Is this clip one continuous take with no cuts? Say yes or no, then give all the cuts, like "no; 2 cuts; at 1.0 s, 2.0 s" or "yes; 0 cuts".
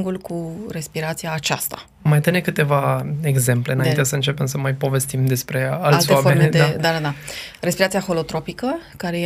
yes; 0 cuts